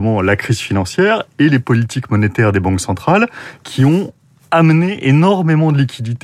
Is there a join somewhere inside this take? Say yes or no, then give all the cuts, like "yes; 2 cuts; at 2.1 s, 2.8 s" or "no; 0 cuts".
no; 0 cuts